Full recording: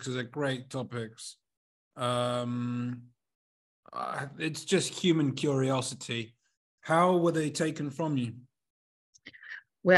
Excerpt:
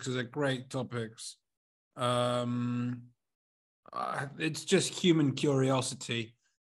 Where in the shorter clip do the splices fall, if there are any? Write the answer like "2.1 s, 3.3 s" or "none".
none